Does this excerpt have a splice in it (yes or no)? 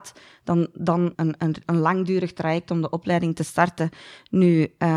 yes